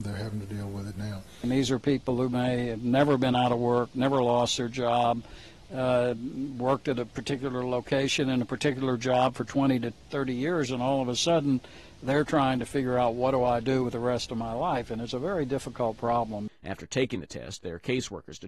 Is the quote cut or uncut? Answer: cut